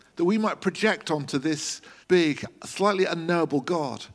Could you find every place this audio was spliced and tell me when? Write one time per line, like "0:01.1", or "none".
0:02.0

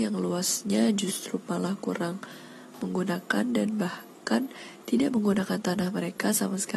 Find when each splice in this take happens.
none

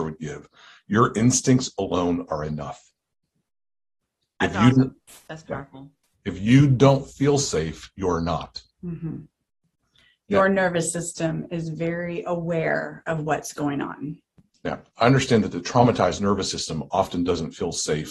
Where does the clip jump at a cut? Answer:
none

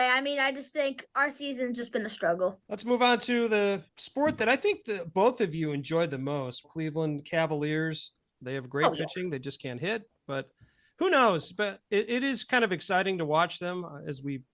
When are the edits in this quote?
0:06.6
0:08.3

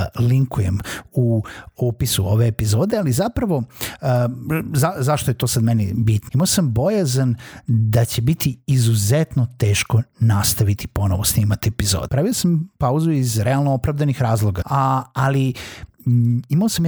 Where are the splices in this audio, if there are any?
0:06.3
0:12.1
0:14.6

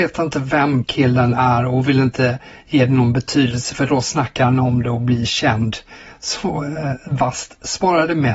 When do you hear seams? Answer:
none

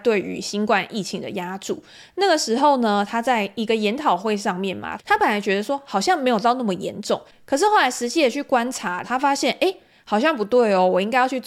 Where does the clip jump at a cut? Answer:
0:05.0
0:09.0

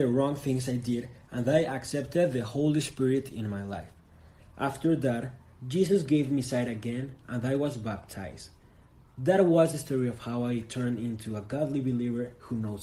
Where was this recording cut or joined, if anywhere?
0:04.4

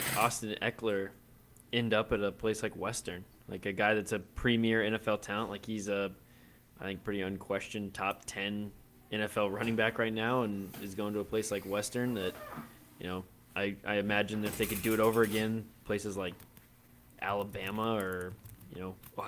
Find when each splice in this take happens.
none

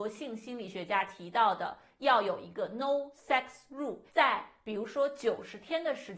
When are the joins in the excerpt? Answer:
0:04.1

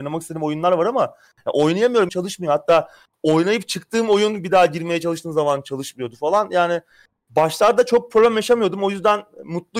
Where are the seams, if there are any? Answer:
0:02.1

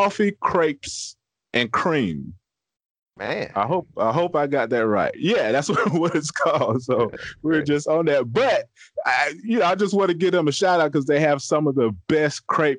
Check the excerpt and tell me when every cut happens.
none

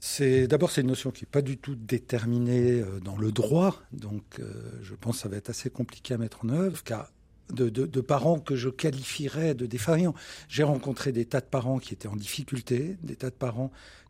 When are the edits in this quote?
0:06.7

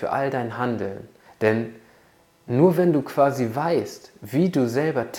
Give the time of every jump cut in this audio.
0:01.3

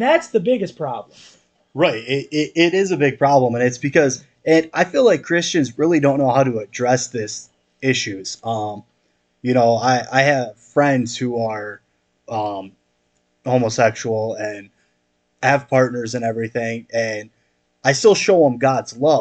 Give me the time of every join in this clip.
none

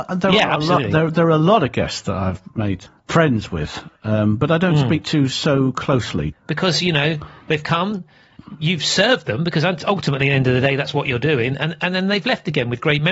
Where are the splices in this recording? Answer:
0:06.3

